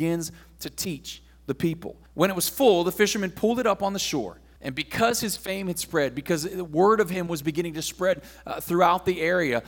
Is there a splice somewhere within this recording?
yes; 2 cuts; at 2.1 s, 4.6 s

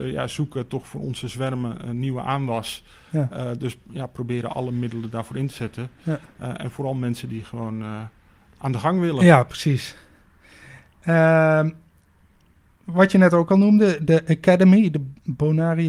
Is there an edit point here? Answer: no; 0 cuts

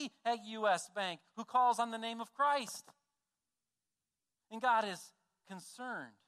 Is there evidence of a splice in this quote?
no; 0 cuts

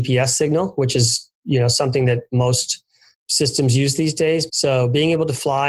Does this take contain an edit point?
yes; 2 cuts; at 3.1 s, 4.5 s

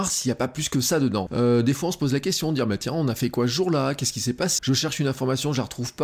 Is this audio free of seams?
no; 2 cuts; at 1.3 s, 4.6 s

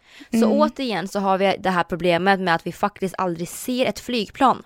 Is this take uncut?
yes; 0 cuts

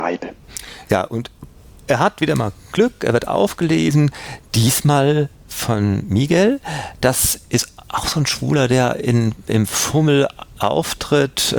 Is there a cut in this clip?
no; 0 cuts

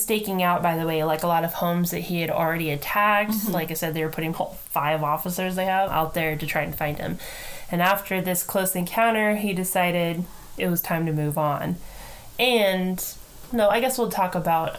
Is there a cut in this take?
yes; 3 cuts; at 4.3 s, 5.9 s, 13.5 s

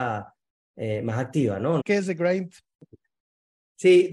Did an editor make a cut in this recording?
yes; 1 cut; at 1.8 s

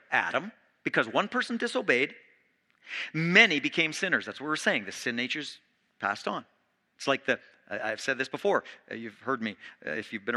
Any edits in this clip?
no; 0 cuts

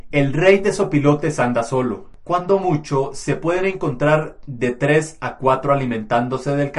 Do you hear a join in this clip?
no; 0 cuts

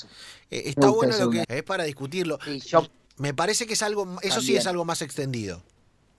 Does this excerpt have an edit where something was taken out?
yes; 1 cut; at 1.4 s

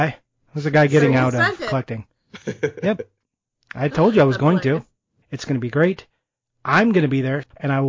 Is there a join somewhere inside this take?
yes; 1 cut; at 5.2 s

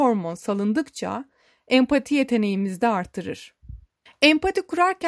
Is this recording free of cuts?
no; 1 cut; at 4.1 s

